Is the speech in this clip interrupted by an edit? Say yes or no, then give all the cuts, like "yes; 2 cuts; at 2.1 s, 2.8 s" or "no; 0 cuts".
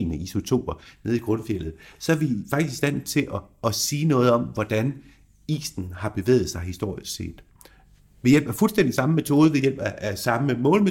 no; 0 cuts